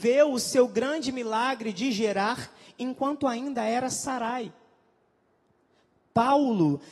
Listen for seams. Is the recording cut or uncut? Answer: uncut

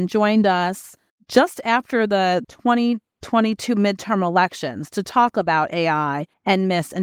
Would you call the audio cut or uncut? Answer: uncut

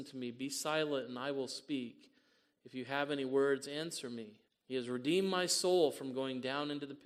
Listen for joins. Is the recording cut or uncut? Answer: cut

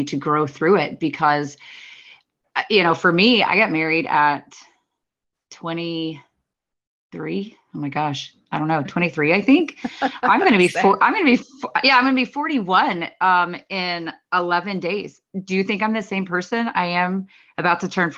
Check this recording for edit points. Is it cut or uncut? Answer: uncut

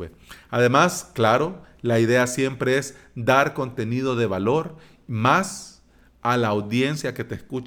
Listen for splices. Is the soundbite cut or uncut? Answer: uncut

